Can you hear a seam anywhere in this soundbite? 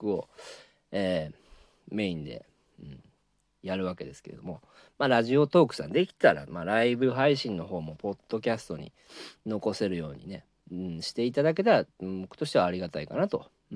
no; 0 cuts

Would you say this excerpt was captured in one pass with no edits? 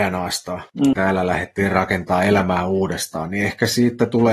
no; 1 cut; at 0.9 s

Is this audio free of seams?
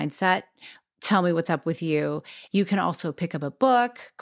no; 1 cut; at 2.5 s

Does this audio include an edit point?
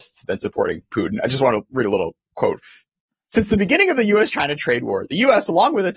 no; 0 cuts

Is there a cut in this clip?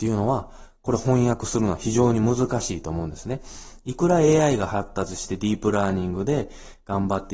no; 0 cuts

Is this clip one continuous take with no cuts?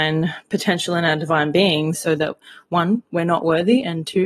no; 1 cut; at 1.9 s

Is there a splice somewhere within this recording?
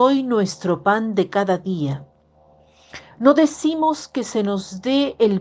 no; 0 cuts

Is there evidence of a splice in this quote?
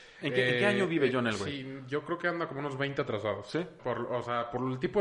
yes; 1 cut; at 3.8 s

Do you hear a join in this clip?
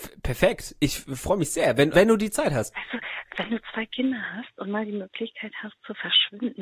yes; 1 cut; at 1.9 s

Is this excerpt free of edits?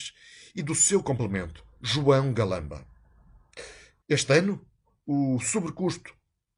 no; 1 cut; at 4.0 s

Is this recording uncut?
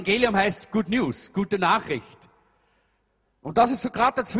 yes; 0 cuts

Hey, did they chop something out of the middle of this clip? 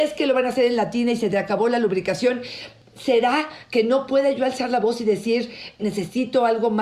yes; 1 cut; at 5.8 s

